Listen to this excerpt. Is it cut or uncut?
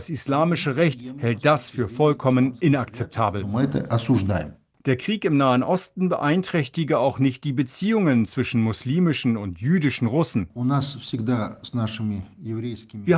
uncut